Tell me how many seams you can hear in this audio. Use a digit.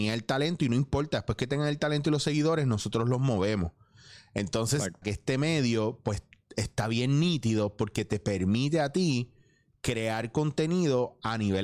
1